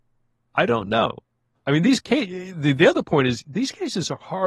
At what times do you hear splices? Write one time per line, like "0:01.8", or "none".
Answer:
none